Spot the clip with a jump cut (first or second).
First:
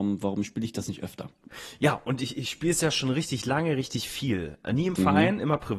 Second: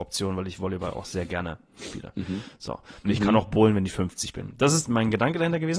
second